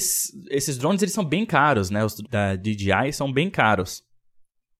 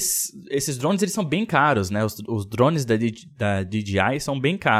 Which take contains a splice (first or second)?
first